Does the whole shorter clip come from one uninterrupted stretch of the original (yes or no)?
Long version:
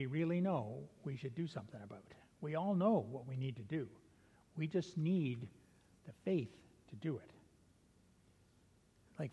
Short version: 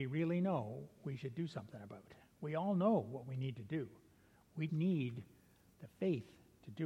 no